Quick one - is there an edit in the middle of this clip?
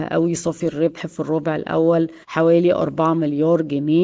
yes; 1 cut; at 2.2 s

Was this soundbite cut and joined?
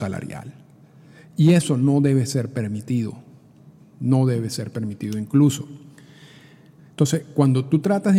yes; 1 cut; at 6.8 s

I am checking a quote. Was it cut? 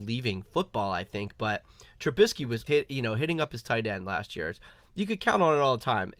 yes; 1 cut; at 2.7 s

